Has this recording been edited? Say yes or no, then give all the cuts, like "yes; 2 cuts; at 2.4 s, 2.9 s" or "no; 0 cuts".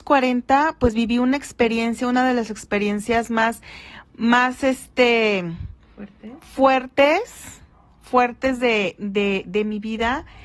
no; 0 cuts